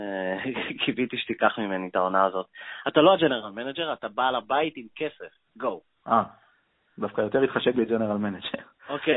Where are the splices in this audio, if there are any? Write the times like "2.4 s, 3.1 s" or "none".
2.8 s